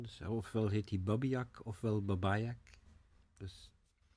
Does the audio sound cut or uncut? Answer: uncut